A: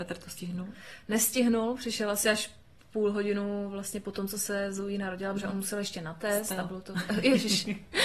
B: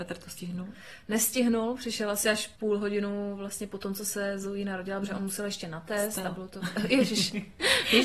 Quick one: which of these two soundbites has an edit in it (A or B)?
B